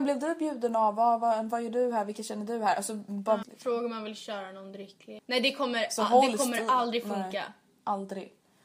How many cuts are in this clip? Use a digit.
2